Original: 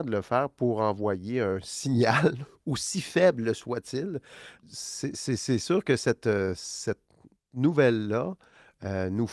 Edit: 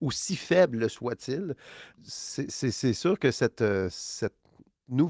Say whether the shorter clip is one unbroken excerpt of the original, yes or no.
yes